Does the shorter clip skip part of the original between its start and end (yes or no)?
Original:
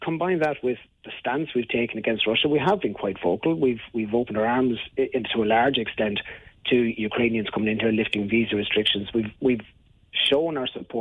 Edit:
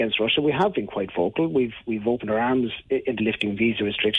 yes